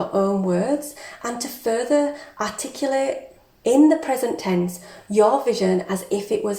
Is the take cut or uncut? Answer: uncut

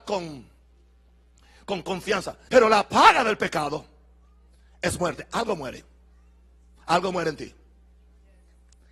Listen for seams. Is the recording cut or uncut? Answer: cut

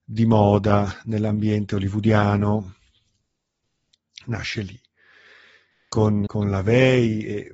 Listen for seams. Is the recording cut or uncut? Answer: cut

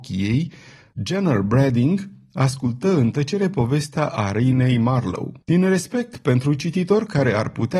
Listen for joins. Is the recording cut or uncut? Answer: cut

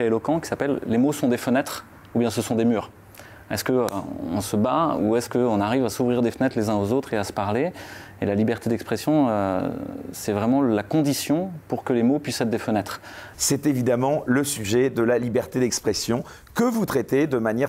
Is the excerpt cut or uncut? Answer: cut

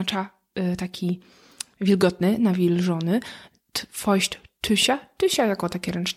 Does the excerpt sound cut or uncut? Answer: uncut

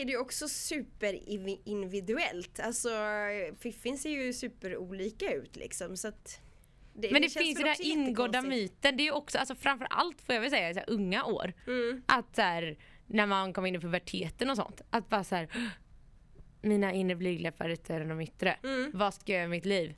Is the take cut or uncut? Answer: uncut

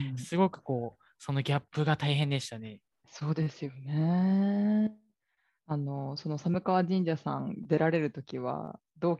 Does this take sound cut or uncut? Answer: uncut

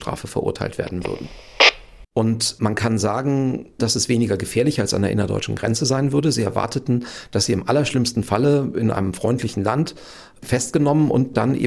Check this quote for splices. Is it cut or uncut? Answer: cut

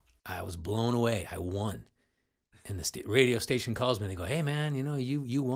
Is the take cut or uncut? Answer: uncut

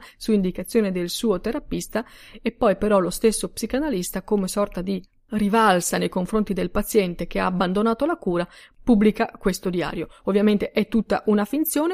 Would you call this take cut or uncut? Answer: uncut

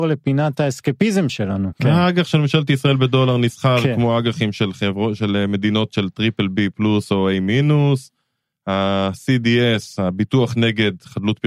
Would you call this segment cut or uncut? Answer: cut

